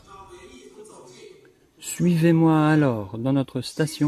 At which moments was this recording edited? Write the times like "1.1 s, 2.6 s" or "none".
none